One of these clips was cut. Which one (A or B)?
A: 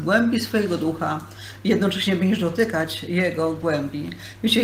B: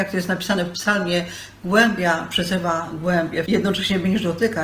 B